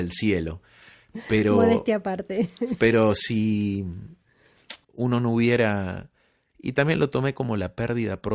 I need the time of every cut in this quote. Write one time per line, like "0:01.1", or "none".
0:04.8
0:06.5